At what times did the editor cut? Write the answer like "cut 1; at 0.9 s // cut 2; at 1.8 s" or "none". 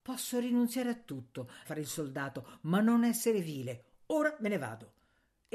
cut 1; at 1.6 s